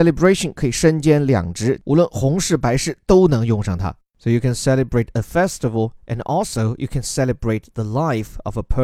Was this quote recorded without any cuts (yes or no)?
yes